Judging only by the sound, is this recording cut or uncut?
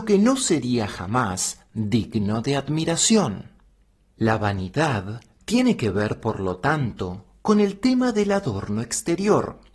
cut